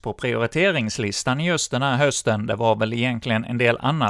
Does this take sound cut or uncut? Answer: uncut